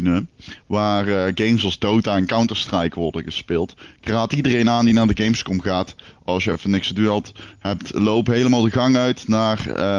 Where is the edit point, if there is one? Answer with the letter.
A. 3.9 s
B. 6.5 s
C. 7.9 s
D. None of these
D